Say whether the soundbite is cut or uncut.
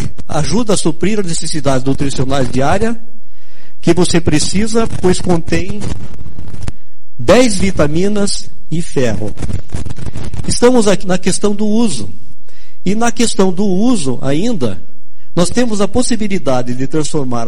cut